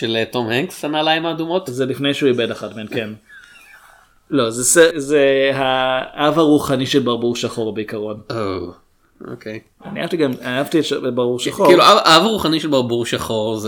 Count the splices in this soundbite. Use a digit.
1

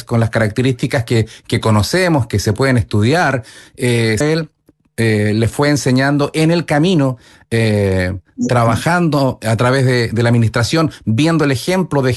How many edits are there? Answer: 1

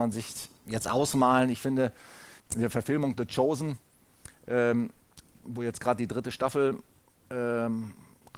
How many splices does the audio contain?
1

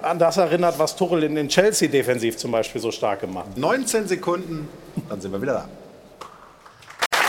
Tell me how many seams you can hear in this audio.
1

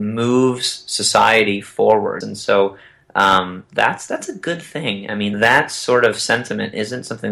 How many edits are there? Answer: 2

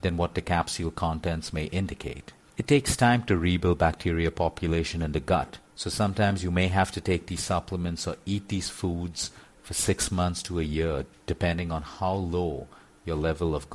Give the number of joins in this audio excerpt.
0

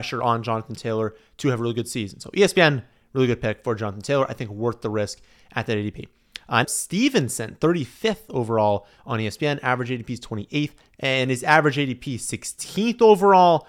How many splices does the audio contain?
2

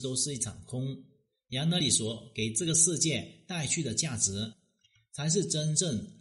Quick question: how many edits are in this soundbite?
0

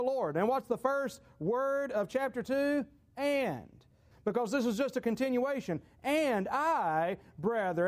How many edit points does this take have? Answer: 1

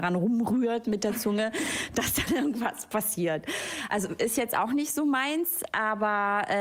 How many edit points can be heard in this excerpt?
0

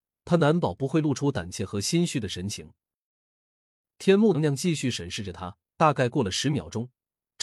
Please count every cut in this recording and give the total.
2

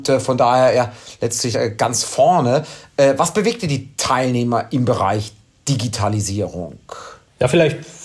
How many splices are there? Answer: 0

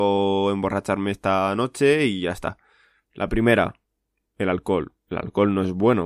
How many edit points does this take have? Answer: 1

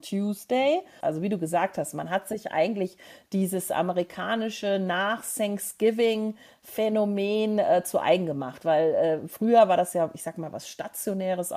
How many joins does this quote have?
1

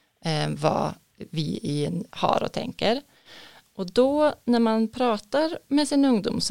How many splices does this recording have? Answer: 1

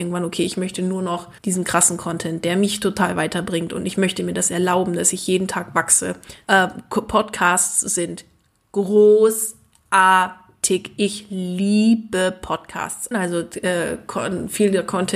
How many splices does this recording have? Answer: 3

